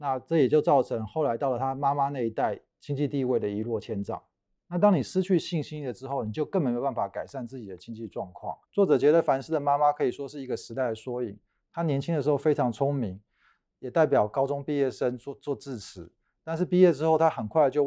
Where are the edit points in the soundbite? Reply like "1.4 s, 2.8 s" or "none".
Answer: 4.7 s, 8.6 s